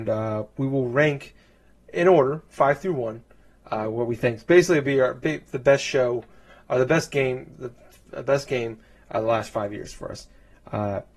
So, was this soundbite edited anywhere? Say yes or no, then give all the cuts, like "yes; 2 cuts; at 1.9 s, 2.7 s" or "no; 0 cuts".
no; 0 cuts